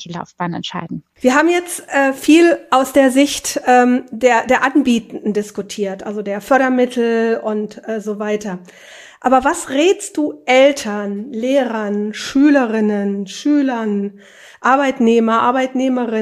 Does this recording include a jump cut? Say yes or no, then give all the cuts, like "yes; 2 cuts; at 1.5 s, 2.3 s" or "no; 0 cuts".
no; 0 cuts